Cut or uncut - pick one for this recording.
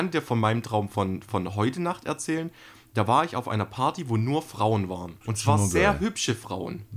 cut